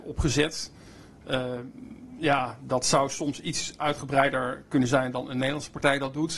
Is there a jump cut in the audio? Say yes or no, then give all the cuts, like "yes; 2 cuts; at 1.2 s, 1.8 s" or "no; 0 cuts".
no; 0 cuts